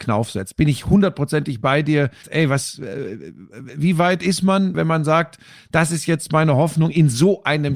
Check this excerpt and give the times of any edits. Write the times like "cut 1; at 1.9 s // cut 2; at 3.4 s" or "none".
cut 1; at 2.2 s // cut 2; at 4.7 s